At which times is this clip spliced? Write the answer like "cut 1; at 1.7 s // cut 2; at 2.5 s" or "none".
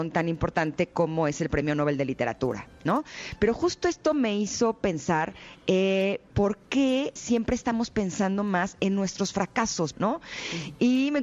cut 1; at 7.2 s // cut 2; at 9.9 s